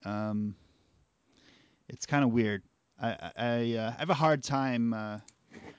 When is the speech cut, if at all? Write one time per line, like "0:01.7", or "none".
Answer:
0:03.3